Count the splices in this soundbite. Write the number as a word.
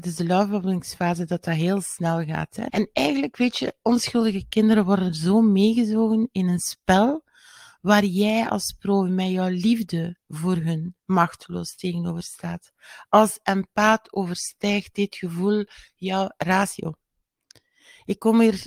two